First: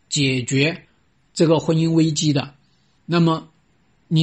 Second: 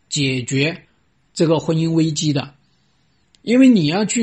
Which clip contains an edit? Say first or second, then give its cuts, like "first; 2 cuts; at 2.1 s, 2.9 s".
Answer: first; 1 cut; at 3.0 s